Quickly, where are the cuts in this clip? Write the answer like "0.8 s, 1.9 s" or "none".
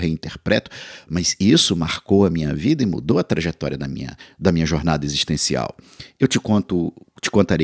none